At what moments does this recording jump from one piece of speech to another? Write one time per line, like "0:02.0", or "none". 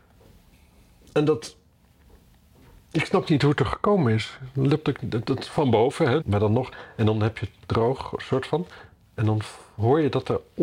0:06.2